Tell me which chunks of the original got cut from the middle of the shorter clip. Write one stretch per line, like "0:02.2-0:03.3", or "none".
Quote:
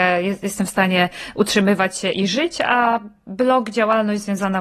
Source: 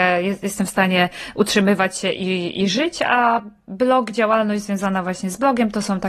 0:02.1-0:02.5